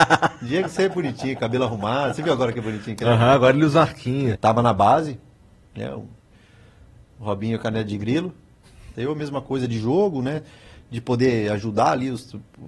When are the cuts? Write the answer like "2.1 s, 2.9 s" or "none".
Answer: 4.3 s, 8.9 s